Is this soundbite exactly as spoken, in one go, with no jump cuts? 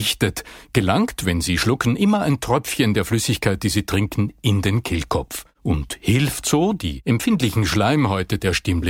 yes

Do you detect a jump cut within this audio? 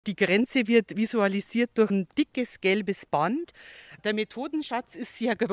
yes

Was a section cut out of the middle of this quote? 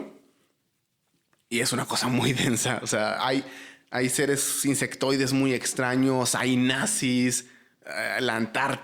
no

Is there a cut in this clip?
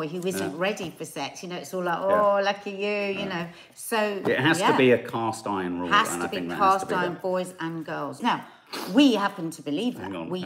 yes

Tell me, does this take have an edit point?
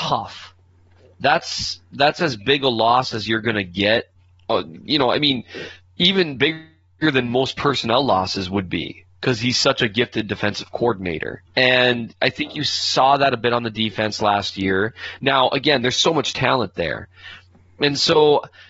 yes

